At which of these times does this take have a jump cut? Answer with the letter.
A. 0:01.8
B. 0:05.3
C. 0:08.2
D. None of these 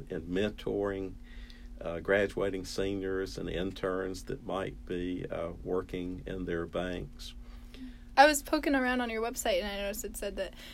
C